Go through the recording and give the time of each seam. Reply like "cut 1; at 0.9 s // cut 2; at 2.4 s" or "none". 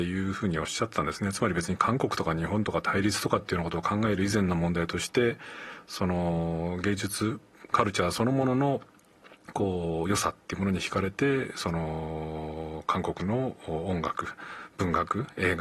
none